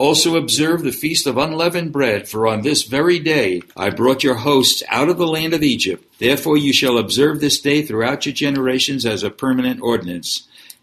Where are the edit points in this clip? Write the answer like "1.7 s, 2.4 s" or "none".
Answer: 3.7 s, 6.1 s